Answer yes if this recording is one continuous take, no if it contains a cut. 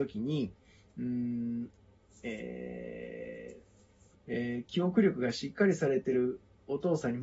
no